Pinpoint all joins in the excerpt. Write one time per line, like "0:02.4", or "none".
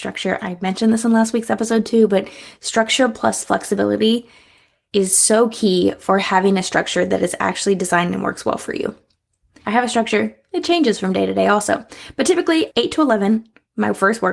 none